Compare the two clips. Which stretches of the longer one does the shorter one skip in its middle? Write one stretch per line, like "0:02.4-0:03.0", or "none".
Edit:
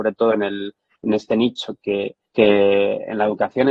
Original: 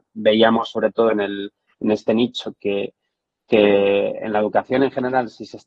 0:03.0-0:03.4